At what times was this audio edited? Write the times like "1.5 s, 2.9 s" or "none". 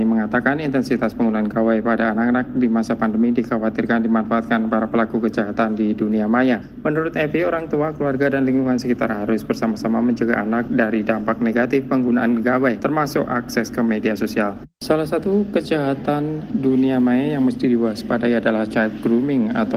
none